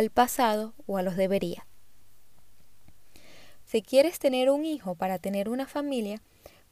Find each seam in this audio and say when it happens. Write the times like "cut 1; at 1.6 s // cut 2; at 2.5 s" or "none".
cut 1; at 3.6 s